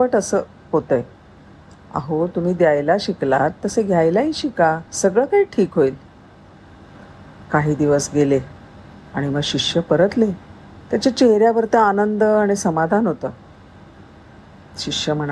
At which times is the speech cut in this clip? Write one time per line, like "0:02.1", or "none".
0:04.9
0:10.8